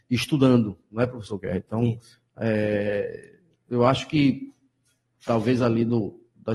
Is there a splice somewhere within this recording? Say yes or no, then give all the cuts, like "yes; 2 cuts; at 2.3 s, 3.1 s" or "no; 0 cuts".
no; 0 cuts